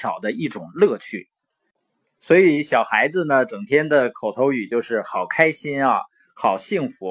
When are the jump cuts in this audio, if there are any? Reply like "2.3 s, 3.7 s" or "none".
2.0 s